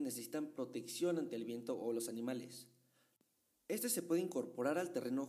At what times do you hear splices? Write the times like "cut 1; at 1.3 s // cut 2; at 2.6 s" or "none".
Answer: cut 1; at 3.5 s